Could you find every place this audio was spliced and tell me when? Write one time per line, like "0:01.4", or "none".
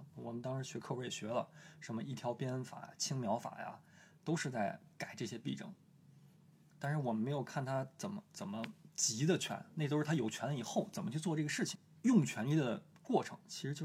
none